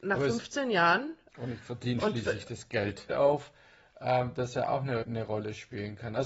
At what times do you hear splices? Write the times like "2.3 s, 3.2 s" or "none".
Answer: 1.3 s, 3.1 s, 5.0 s